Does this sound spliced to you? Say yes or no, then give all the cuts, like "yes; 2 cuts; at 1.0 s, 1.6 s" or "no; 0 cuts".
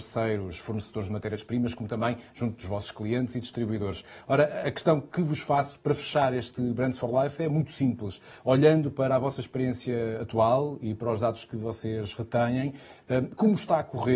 no; 0 cuts